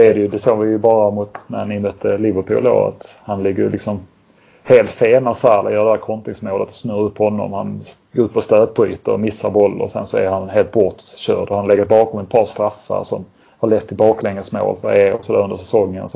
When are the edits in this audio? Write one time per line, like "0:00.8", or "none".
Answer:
none